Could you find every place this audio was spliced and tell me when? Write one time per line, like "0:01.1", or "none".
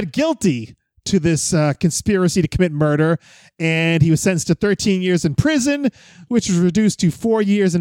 none